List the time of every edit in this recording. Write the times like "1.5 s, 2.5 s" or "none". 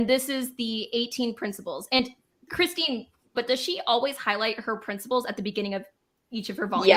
3.3 s